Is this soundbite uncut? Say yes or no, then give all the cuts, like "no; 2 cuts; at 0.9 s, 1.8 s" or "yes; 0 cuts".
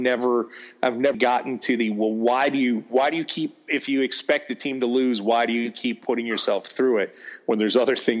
no; 1 cut; at 1.1 s